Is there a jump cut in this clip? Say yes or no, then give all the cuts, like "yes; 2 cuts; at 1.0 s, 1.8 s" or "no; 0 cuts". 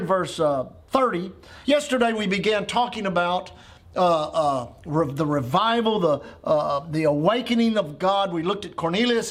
yes; 1 cut; at 1.6 s